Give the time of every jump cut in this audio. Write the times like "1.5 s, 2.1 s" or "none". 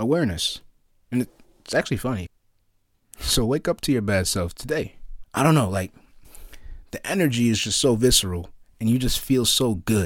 2.3 s, 5.2 s